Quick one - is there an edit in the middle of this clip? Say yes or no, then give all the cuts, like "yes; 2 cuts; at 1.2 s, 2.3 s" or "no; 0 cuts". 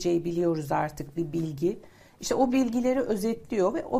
no; 0 cuts